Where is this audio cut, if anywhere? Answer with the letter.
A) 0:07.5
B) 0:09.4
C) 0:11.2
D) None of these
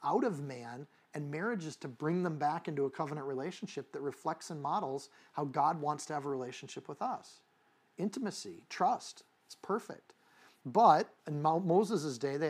C